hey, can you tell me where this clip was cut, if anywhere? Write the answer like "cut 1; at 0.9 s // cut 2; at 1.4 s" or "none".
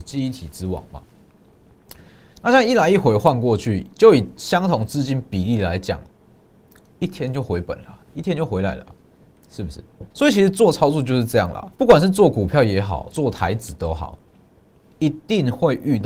cut 1; at 10.1 s // cut 2; at 11.7 s // cut 3; at 13.1 s